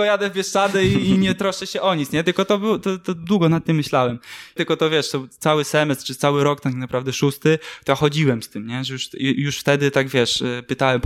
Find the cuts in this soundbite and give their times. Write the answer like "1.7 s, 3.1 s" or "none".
4.6 s